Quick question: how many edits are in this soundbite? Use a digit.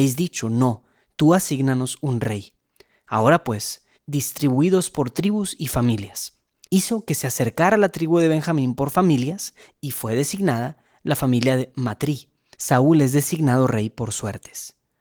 3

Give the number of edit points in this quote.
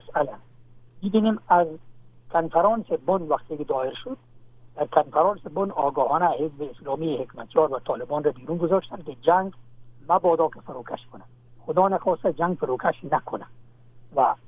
0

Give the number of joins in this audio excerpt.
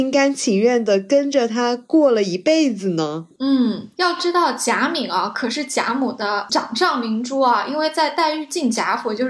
0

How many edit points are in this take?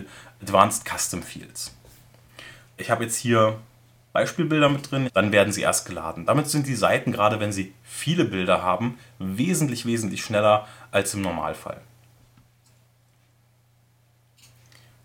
2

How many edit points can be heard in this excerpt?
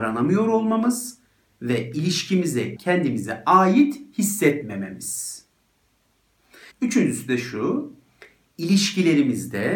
2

